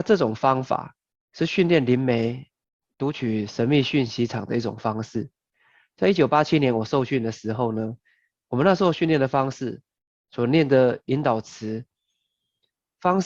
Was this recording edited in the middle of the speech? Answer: no; 0 cuts

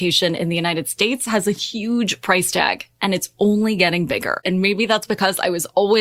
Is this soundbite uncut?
no; 1 cut; at 4.4 s

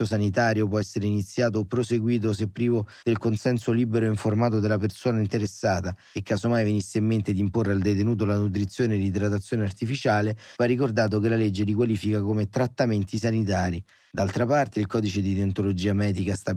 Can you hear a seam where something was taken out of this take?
no; 0 cuts

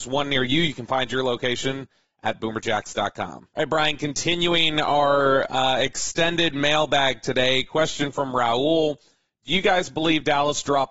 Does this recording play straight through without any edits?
yes; 0 cuts

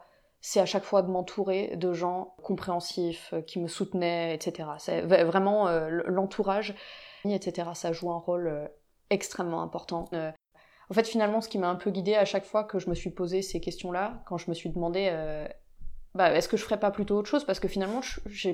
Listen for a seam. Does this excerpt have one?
yes; 2 cuts; at 7.2 s, 10.1 s

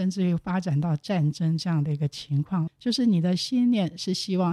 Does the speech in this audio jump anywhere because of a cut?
yes; 1 cut; at 2.7 s

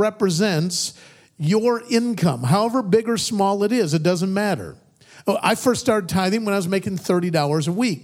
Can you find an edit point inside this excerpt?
no; 0 cuts

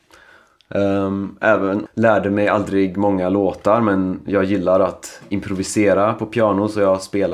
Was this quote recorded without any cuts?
no; 1 cut; at 1.9 s

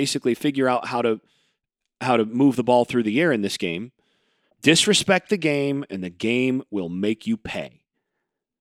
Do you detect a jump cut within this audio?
yes; 1 cut; at 4.5 s

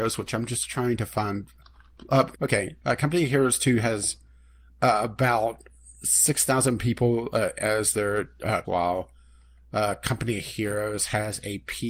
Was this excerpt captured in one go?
no; 2 cuts; at 2.3 s, 8.6 s

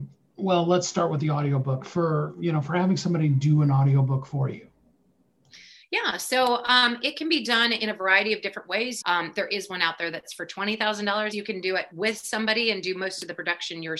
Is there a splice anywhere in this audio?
yes; 2 cuts; at 9.0 s, 11.3 s

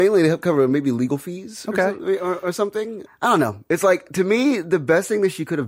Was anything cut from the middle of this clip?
yes; 1 cut; at 3.1 s

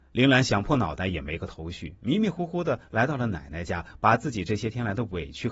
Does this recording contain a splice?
no; 0 cuts

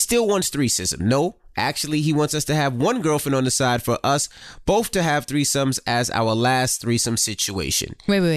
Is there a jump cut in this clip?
no; 0 cuts

